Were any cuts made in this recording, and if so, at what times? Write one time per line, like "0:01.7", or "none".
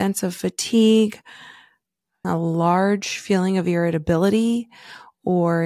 0:02.2